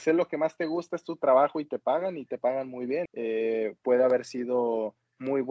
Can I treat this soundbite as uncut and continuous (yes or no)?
no